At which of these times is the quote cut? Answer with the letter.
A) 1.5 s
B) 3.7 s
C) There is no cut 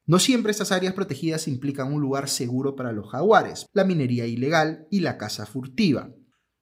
B